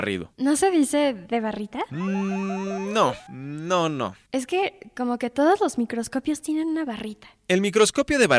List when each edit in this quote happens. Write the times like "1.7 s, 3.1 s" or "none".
none